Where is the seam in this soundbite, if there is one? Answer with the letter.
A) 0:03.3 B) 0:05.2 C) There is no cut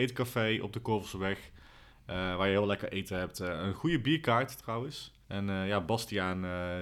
B